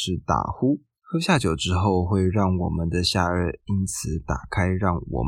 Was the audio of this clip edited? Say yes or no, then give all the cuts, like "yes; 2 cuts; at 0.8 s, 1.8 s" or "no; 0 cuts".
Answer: yes; 1 cut; at 1.0 s